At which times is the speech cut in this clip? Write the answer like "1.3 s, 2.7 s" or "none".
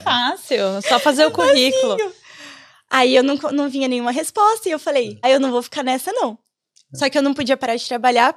5.2 s